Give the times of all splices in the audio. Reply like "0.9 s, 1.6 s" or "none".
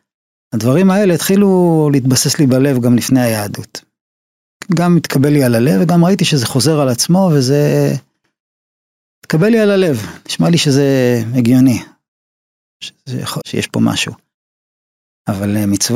13.4 s